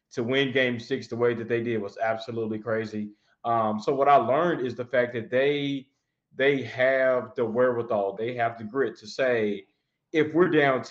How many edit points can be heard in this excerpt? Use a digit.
1